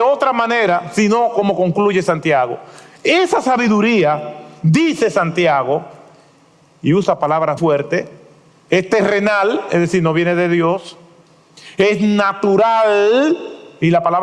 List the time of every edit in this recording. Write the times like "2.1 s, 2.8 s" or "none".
7.6 s